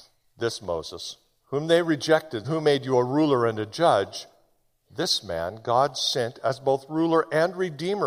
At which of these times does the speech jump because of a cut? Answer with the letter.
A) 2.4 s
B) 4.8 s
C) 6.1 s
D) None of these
A